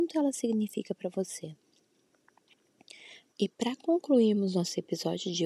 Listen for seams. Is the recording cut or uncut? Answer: cut